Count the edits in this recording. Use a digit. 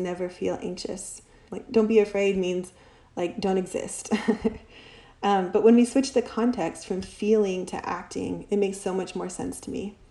1